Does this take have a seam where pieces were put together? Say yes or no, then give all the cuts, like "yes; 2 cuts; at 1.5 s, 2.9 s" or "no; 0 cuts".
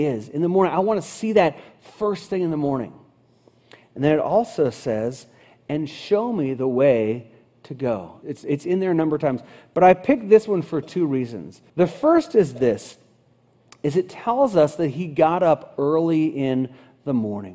yes; 2 cuts; at 8.2 s, 11.7 s